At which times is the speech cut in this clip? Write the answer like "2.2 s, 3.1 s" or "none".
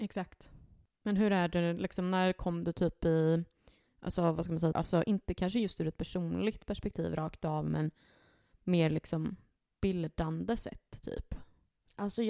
4.7 s